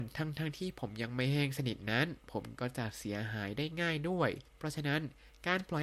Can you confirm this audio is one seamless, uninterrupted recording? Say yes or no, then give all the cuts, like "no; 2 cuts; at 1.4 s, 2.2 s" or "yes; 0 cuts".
no; 1 cut; at 4.5 s